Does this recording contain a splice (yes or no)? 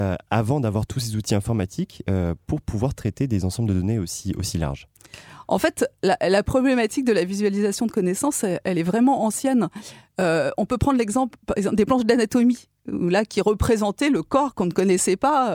no